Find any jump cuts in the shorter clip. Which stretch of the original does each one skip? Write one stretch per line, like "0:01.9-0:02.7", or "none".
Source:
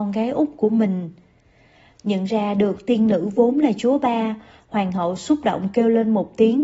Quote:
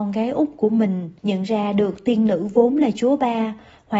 0:01.2-0:02.0